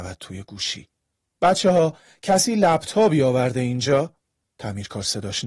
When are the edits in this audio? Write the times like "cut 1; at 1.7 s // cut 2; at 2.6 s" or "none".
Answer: none